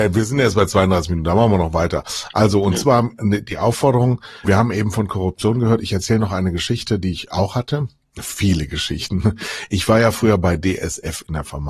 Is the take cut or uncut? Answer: cut